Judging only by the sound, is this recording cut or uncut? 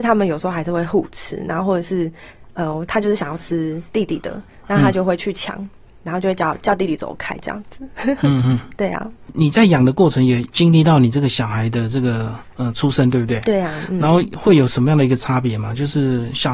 uncut